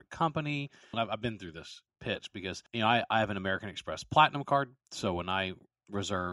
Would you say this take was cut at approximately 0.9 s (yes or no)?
yes